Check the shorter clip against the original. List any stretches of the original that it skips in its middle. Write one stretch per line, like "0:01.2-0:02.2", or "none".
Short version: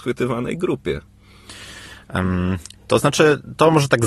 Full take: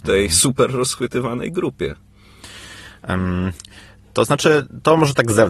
0:03.7-0:04.0